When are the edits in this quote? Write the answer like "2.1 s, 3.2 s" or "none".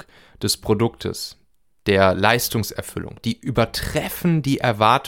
3.2 s